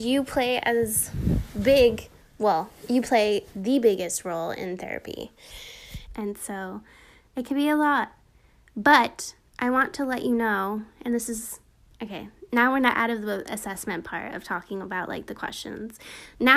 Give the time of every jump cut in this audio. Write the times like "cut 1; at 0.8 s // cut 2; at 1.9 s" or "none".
cut 1; at 6.1 s